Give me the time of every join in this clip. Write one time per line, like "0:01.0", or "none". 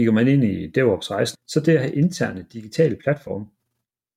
0:01.3